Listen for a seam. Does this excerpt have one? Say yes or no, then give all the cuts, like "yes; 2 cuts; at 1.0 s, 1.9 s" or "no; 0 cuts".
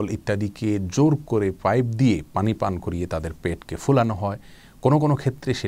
no; 0 cuts